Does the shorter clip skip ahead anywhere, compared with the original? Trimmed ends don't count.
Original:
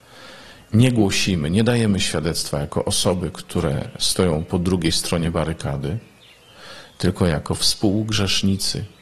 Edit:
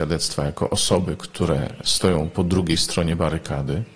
no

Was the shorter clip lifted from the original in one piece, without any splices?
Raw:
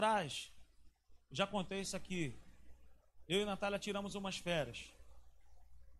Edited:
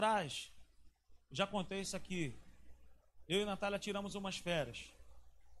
yes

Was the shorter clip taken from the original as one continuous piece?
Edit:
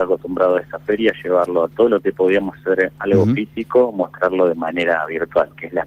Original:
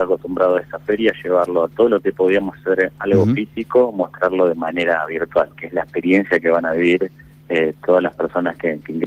yes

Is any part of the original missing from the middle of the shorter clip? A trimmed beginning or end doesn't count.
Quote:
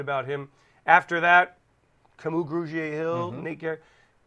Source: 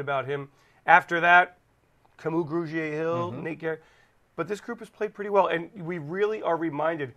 no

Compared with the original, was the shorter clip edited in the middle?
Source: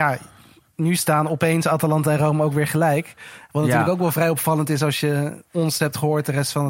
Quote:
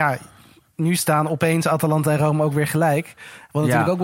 no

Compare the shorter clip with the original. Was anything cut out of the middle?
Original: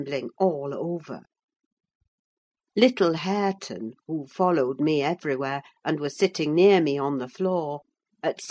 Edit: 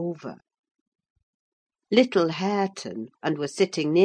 yes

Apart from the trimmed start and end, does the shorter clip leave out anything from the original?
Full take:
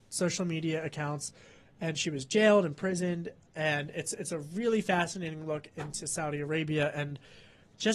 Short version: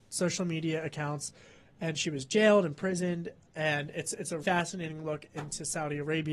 yes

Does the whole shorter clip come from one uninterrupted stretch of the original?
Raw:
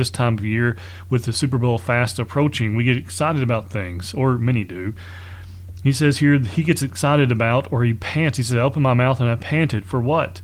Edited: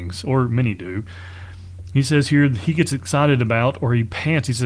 yes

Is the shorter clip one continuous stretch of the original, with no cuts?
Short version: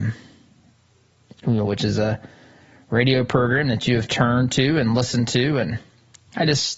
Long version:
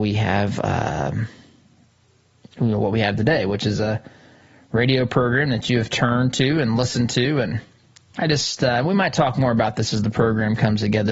no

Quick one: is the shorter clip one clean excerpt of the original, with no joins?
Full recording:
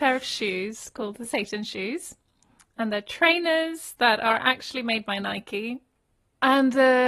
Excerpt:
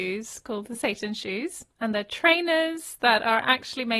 no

